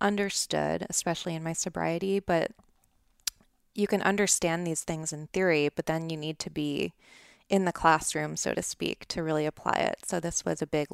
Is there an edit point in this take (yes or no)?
no